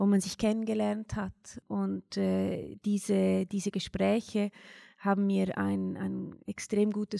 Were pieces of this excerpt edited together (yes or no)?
no